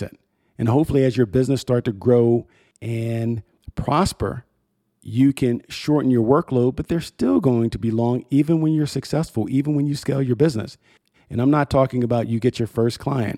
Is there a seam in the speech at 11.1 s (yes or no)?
yes